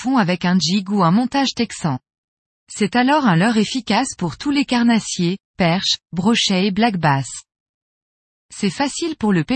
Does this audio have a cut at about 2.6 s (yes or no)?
yes